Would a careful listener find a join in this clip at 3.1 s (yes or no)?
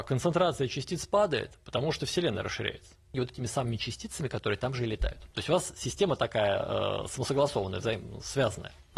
yes